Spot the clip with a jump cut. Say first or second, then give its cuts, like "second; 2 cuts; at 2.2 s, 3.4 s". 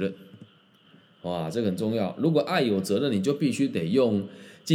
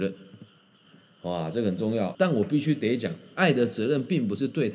second; 1 cut; at 2.1 s